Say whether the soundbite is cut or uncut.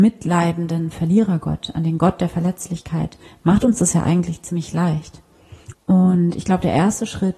cut